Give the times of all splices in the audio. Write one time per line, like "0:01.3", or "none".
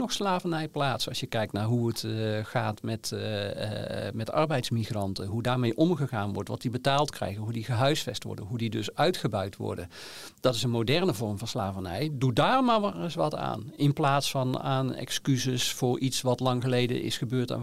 none